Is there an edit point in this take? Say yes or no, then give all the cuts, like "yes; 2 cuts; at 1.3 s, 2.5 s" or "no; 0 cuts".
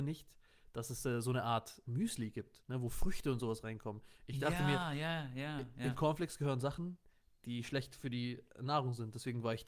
yes; 1 cut; at 1.8 s